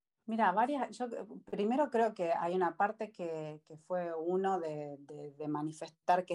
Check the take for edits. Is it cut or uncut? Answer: uncut